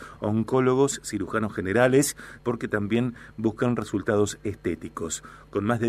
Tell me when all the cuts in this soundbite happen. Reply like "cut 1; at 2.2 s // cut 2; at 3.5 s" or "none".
cut 1; at 2.4 s